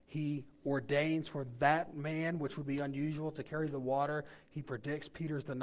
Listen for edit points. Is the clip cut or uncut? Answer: uncut